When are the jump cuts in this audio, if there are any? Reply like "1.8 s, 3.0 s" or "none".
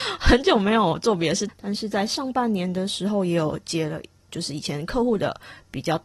1.5 s, 4.3 s